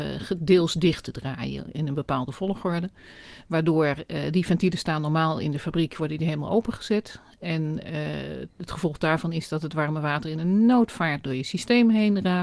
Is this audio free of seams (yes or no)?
yes